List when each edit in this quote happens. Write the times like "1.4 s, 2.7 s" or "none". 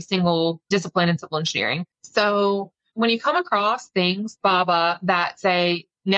1.9 s, 4.4 s